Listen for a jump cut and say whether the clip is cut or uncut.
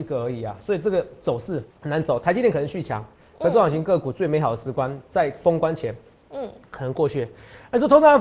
cut